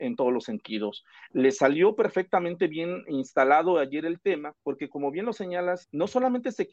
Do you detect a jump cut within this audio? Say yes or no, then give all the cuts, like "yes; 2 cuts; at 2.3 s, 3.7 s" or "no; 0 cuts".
yes; 2 cuts; at 4.6 s, 5.8 s